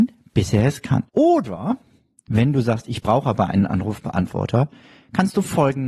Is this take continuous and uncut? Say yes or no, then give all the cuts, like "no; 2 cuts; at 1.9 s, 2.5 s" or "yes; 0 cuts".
no; 1 cut; at 1.1 s